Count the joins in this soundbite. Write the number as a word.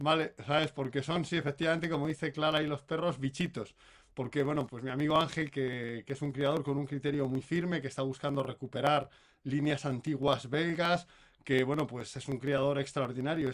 one